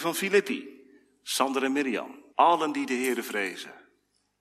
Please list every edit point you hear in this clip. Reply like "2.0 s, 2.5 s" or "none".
2.3 s